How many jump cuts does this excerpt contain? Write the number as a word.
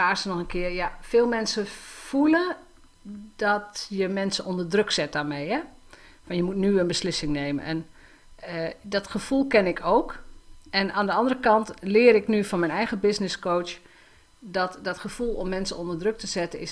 zero